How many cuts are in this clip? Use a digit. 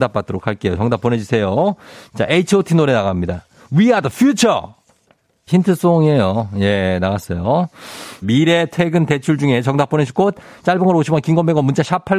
2